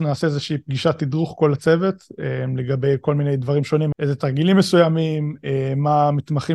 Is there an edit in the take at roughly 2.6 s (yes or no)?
no